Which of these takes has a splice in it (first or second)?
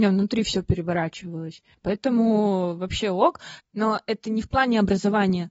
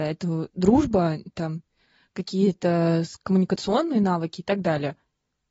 first